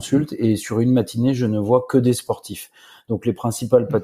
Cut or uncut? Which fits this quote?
uncut